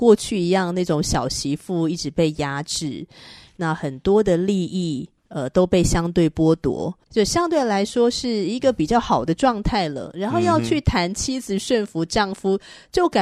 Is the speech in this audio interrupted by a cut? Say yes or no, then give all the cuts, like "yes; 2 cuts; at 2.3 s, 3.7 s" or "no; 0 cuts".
yes; 1 cut; at 7.0 s